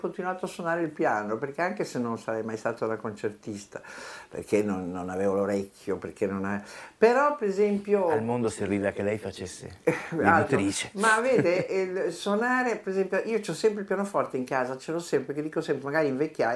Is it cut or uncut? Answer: uncut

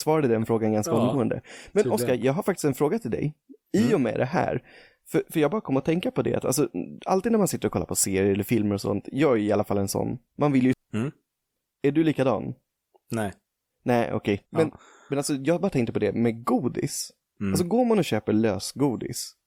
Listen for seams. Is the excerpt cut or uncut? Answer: cut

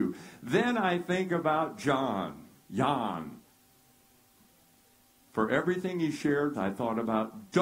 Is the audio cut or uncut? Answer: cut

